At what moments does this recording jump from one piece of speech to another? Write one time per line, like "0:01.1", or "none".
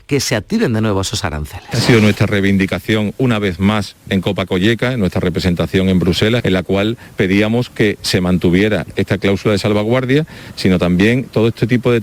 0:06.4
0:10.5